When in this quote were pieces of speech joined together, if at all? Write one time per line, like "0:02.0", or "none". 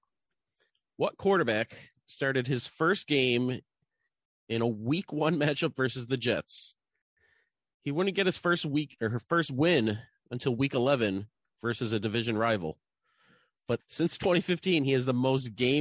none